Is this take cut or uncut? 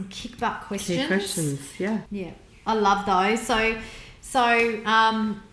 cut